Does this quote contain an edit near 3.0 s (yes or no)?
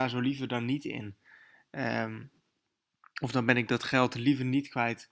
no